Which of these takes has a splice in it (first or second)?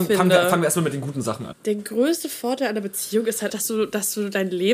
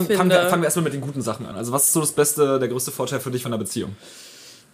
first